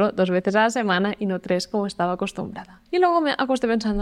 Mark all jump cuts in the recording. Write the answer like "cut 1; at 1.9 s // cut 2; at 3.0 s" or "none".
cut 1; at 2.9 s